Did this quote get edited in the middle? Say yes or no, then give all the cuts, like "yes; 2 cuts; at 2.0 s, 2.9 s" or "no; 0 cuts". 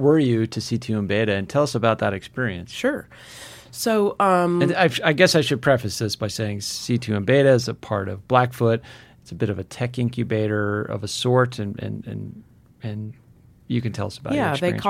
no; 0 cuts